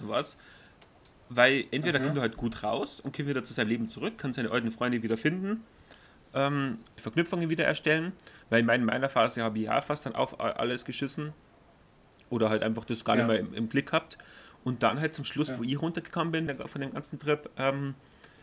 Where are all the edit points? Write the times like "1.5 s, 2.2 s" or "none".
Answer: 7.0 s, 16.5 s